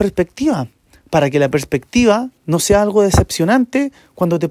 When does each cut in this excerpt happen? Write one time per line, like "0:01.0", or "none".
0:02.4

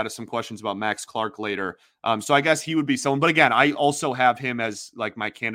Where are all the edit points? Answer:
none

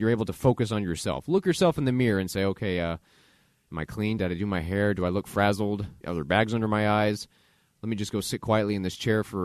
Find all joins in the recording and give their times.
0:04.2
0:06.0

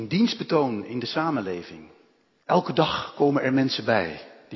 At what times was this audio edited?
0:02.4

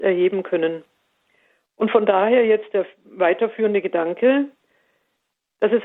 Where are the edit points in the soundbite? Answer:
none

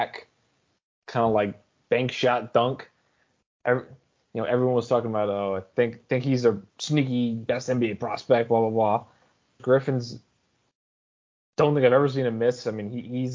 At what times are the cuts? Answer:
0:06.7
0:09.6

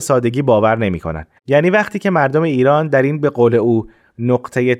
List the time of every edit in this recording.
0:01.4

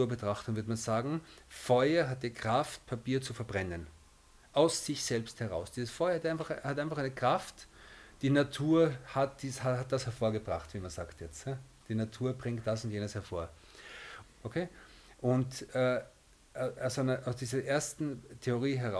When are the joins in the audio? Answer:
0:14.2

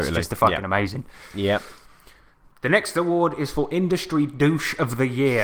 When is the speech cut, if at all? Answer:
none

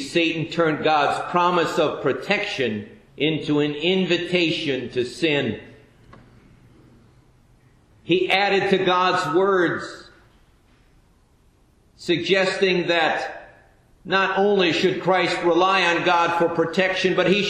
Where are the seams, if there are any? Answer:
0:03.1

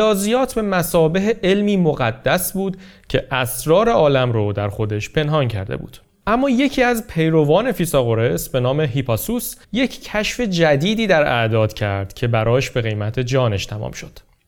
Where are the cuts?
0:09.6

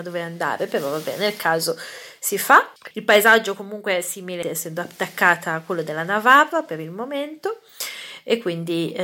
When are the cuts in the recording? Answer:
0:02.9
0:04.4

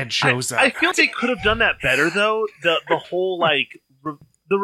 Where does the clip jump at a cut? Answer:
0:00.9

